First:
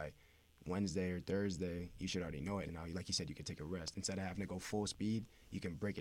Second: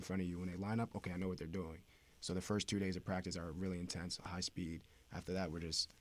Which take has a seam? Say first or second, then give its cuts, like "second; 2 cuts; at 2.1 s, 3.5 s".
first; 1 cut; at 2.6 s